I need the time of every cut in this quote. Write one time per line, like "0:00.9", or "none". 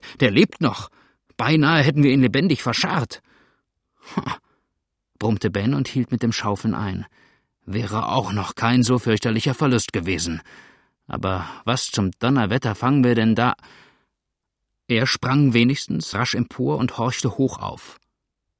0:14.7
0:16.1